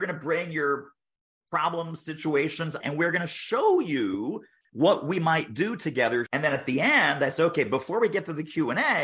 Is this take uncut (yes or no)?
no